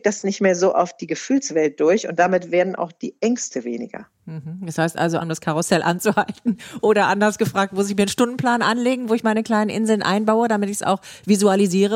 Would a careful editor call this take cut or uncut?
cut